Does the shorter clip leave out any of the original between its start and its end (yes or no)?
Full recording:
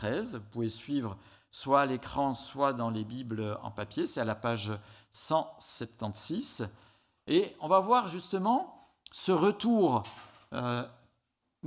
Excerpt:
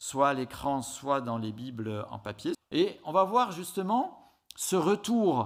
yes